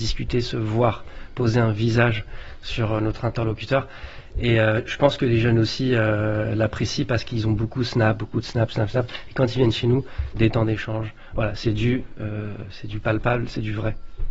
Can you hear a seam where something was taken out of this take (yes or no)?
yes